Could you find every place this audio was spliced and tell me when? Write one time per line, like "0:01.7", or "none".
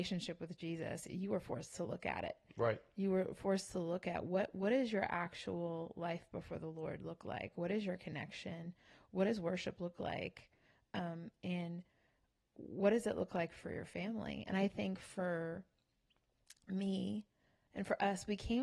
none